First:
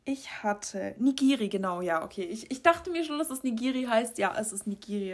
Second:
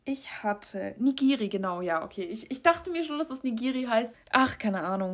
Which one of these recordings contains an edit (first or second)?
second